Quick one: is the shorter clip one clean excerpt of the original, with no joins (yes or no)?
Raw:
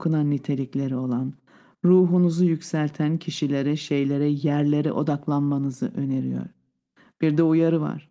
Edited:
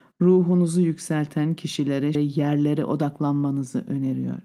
no